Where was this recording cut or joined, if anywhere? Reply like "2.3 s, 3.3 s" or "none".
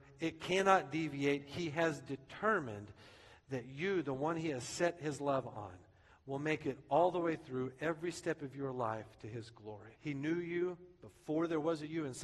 9.9 s